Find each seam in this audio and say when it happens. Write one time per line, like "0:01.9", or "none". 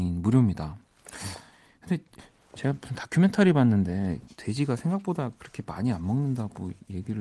0:04.3